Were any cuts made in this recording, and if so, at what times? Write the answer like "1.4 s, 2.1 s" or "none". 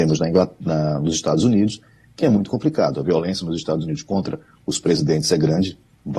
none

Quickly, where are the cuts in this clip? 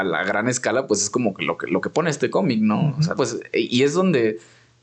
3.1 s

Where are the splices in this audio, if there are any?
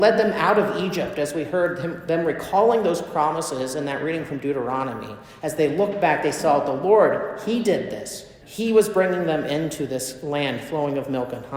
8.4 s

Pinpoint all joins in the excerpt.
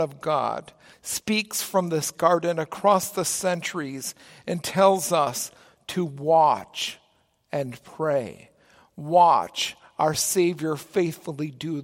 0.9 s

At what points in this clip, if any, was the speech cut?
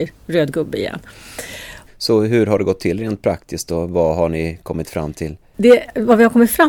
1.9 s

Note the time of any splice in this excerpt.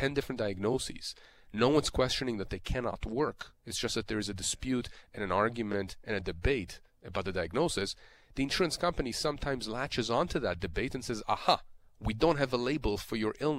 none

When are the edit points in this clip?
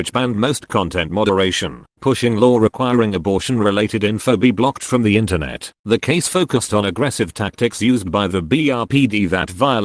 2.0 s, 5.7 s

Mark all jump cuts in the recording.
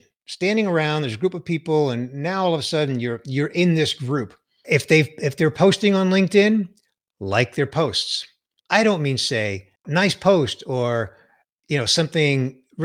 4.6 s, 8.6 s, 9.7 s

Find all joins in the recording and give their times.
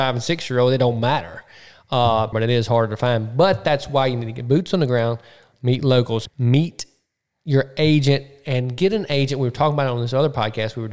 2.3 s, 6.3 s

